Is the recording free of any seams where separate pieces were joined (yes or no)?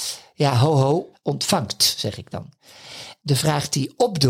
no